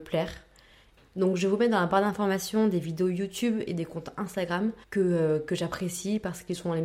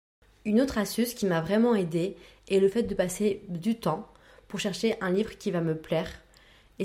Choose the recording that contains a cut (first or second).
first